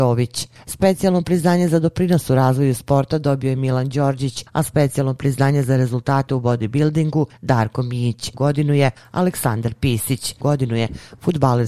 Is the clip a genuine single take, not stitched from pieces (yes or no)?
no